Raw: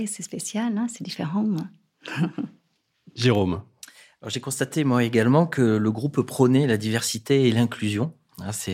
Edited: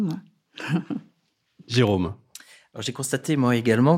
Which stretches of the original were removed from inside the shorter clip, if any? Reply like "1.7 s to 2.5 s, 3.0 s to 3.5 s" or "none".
none